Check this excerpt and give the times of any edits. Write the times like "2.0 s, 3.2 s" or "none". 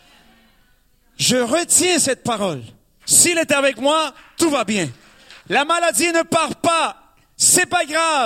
3.0 s, 5.4 s